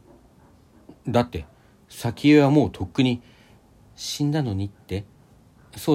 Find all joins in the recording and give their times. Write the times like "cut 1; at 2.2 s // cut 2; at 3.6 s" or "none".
none